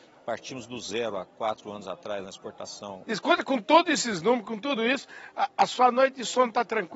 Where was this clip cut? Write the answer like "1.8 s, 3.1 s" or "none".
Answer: 3.0 s